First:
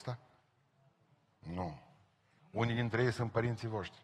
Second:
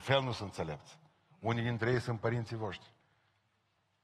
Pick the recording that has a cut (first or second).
first